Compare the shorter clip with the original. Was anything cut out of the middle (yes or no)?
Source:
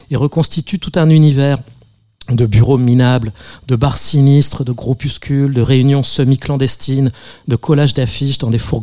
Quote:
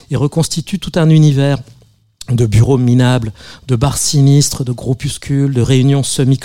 no